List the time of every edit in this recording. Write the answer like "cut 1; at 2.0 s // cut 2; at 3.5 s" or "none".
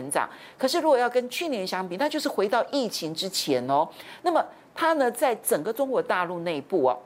cut 1; at 4.2 s